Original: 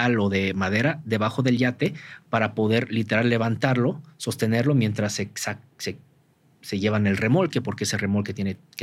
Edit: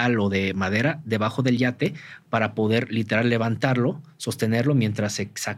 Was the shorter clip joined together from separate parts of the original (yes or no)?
no